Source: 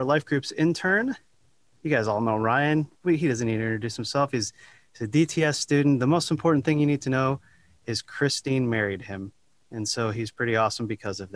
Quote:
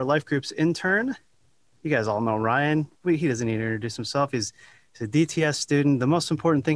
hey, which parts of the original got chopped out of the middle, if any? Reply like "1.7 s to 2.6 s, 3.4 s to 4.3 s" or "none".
none